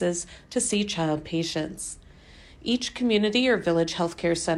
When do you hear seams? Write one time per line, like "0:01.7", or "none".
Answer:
none